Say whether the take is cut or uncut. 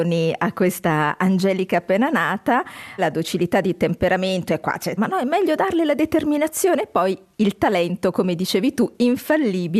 cut